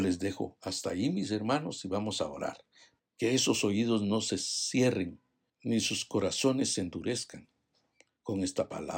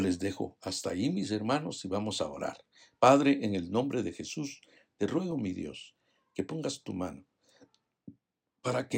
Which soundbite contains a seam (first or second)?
first